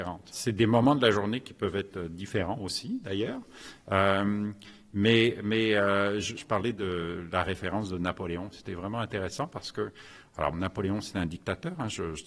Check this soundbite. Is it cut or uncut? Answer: cut